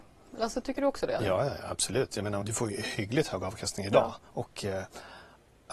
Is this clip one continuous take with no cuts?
no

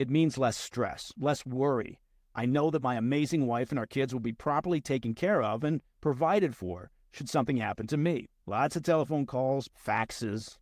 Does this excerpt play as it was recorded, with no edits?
no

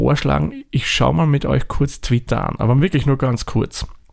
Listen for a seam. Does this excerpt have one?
no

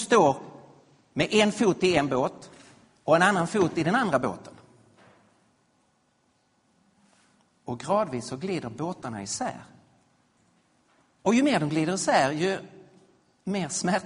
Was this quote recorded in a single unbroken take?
yes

